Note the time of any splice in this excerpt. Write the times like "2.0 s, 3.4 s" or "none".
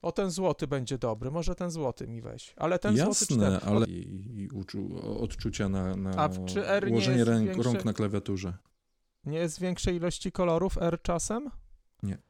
3.8 s